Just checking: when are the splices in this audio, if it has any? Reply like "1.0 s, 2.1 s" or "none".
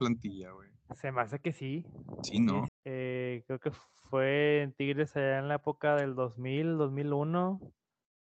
2.7 s